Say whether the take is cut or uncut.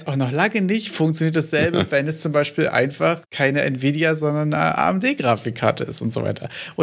uncut